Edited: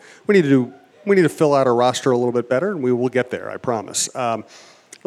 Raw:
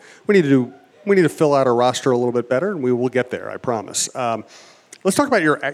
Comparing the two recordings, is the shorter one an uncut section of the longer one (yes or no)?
yes